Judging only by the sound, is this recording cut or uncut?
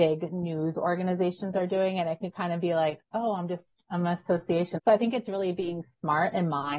cut